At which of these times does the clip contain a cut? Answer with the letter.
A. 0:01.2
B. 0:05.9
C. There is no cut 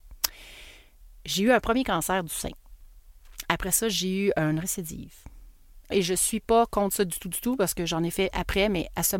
B